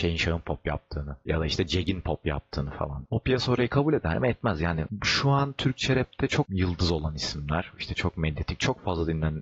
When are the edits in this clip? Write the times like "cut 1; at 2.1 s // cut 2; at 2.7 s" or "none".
cut 1; at 3.1 s